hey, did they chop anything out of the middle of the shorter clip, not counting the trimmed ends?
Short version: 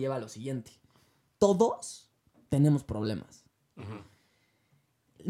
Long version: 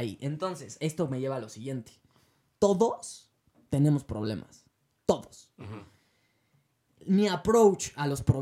yes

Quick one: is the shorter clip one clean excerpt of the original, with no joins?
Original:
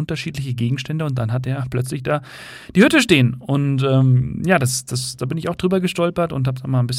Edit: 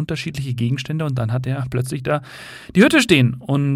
yes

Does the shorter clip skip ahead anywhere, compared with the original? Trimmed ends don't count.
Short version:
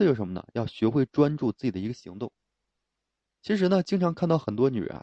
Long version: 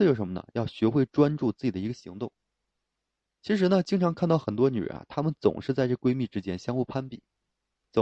no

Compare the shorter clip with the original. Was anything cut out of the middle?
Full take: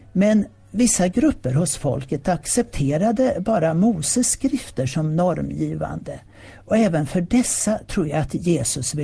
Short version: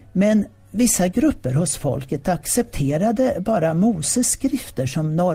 no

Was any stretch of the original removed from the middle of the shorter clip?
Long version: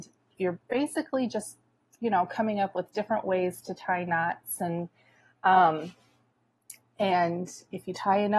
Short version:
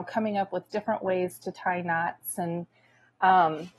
no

